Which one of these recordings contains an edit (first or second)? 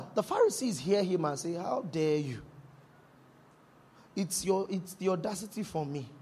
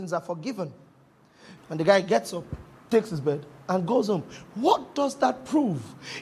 second